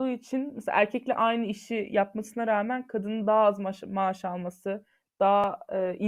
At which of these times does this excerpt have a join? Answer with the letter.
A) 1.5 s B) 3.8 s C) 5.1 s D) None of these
D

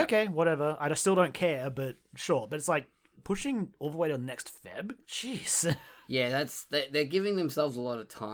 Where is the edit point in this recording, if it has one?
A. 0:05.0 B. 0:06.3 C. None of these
A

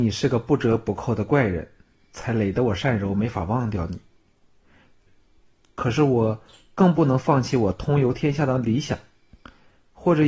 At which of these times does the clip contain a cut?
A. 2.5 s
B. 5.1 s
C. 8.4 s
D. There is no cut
B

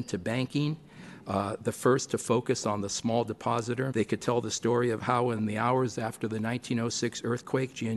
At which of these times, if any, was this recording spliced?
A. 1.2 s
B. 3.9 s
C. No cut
B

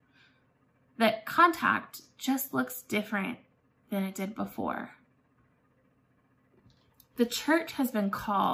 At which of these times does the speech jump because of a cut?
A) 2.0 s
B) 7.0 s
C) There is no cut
C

